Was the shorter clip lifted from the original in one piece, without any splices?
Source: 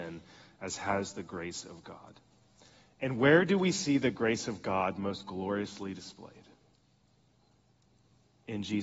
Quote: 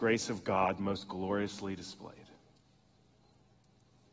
yes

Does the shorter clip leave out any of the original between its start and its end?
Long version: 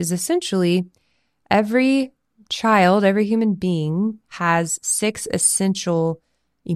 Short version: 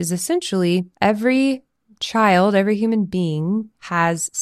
yes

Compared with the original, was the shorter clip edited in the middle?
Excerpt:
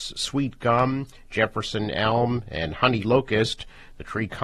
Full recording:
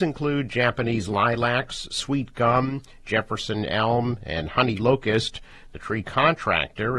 no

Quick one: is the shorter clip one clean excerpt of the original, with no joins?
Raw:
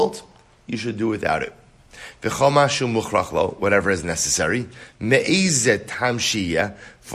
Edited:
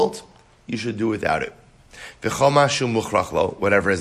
yes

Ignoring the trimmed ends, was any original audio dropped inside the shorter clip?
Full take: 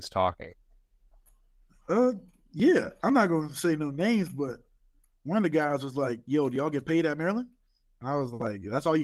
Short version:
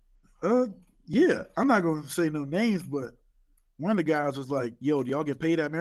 no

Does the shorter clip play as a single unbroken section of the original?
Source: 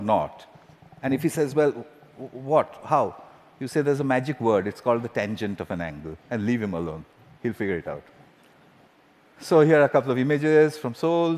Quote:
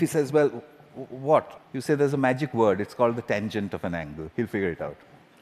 no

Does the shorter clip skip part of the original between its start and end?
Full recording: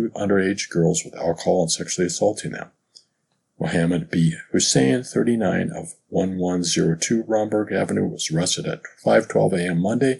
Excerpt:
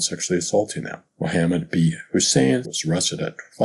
yes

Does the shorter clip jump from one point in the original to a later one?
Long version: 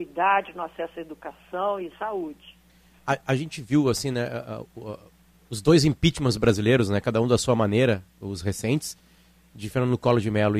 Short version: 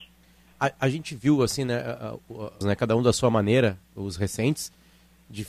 yes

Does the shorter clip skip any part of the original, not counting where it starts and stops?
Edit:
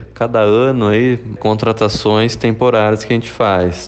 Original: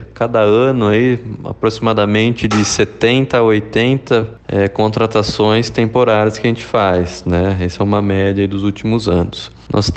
yes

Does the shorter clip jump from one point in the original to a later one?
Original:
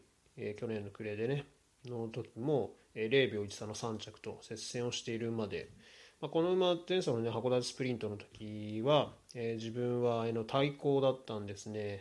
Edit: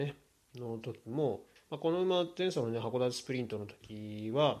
yes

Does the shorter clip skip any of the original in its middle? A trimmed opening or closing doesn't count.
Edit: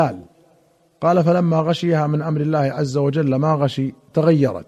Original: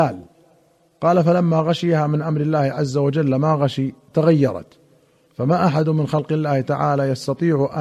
no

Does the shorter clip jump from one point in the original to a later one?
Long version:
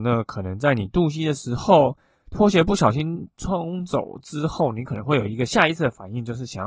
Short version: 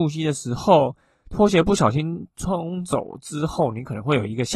no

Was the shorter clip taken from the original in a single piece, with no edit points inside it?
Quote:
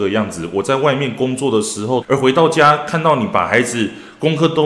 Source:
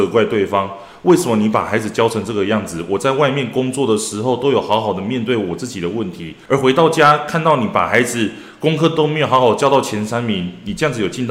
no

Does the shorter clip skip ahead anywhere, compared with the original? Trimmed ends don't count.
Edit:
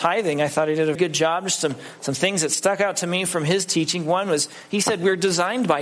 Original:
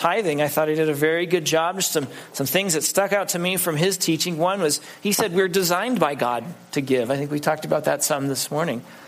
yes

